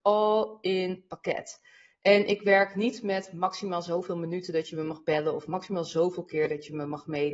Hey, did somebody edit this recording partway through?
no; 0 cuts

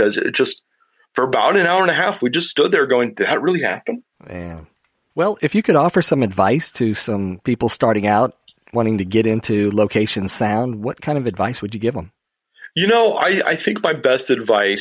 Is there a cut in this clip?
no; 0 cuts

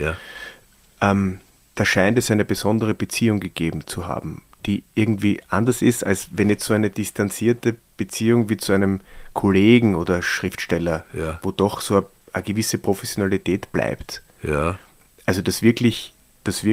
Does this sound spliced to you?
no; 0 cuts

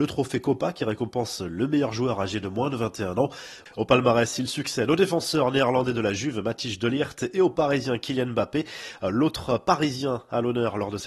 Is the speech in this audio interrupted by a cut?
no; 0 cuts

